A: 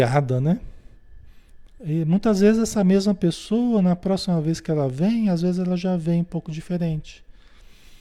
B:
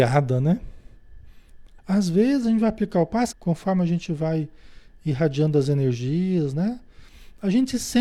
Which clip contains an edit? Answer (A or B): B